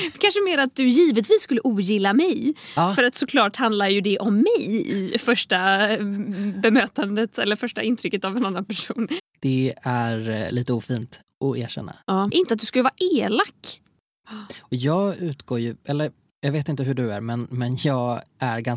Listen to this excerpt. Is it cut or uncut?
cut